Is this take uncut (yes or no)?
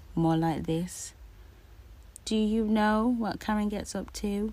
no